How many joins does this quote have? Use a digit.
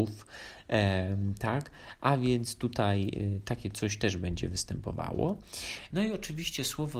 1